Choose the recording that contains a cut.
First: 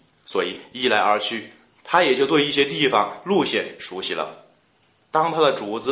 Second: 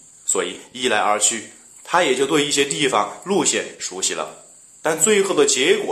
second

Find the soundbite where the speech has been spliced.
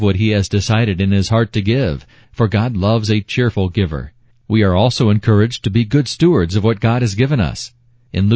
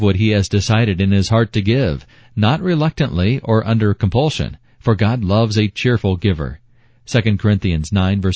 first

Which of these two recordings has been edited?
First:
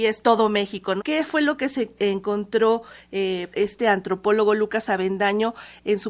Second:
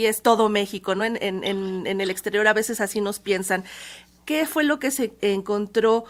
first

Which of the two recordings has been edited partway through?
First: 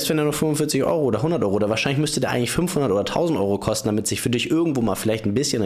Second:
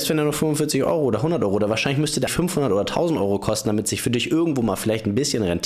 second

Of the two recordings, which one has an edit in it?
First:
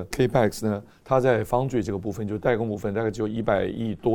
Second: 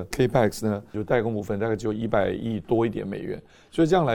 second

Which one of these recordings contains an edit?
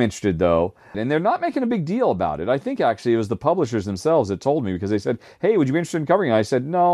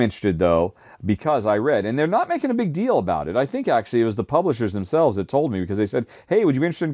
first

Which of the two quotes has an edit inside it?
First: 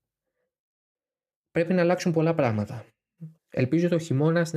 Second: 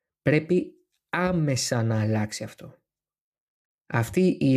first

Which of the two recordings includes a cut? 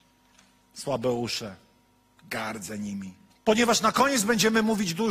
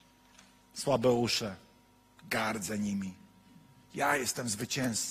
first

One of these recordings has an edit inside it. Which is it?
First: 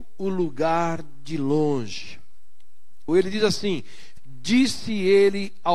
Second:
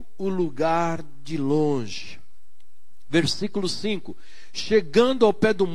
first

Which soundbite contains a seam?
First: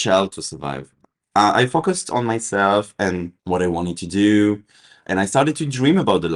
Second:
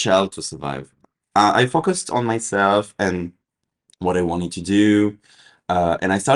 first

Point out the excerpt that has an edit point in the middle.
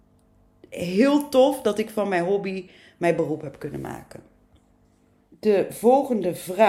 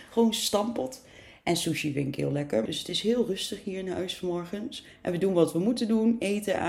second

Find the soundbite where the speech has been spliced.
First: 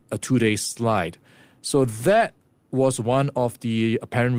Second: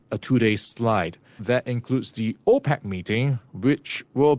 second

